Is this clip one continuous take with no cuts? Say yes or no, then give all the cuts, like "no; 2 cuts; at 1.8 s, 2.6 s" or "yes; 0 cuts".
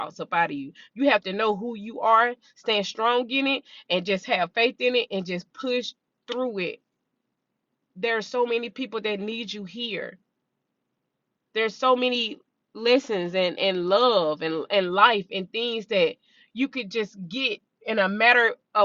yes; 0 cuts